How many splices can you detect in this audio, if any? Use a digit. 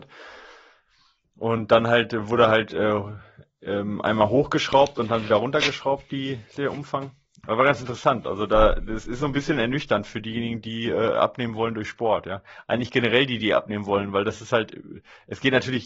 0